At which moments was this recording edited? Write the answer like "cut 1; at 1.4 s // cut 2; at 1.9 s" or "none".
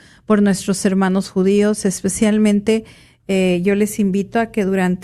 none